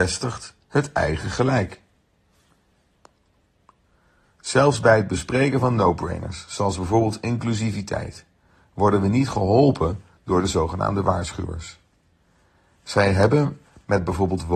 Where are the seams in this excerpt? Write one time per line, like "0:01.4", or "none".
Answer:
none